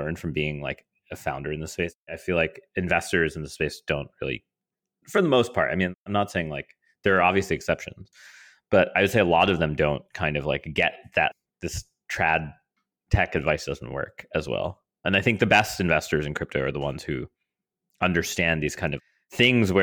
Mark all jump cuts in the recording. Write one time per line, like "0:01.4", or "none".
none